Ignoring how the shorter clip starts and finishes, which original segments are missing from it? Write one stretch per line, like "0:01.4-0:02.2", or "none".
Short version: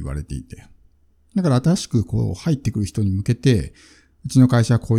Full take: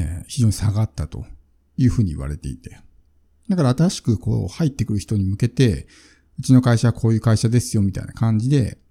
none